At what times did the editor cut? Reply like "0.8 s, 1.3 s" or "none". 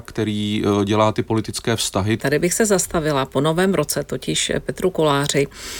2.2 s